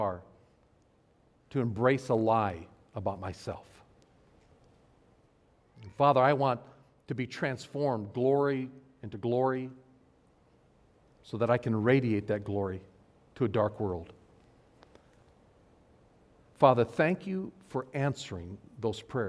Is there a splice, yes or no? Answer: no